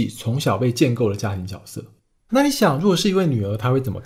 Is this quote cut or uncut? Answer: cut